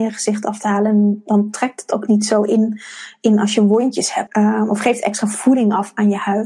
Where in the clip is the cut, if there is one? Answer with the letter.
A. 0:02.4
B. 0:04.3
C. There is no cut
B